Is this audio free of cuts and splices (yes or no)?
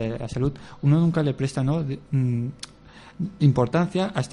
yes